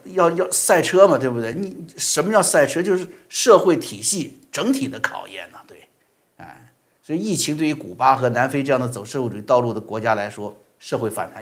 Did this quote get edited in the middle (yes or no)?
no